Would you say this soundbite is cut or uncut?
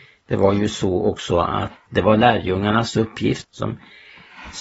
cut